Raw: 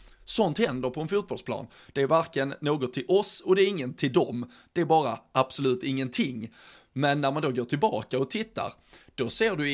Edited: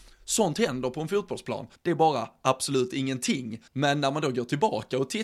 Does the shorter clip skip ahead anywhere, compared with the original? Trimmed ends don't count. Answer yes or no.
yes